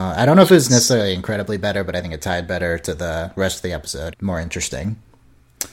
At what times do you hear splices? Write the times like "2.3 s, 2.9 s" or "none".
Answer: 4.1 s